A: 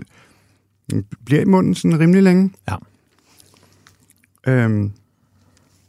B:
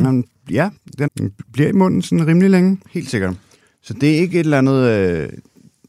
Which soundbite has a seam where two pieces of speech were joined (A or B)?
B